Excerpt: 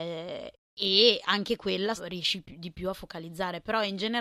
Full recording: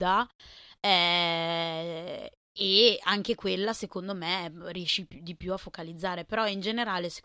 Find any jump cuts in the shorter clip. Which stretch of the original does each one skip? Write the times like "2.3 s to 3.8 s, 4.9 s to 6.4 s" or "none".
3.7 s to 4.6 s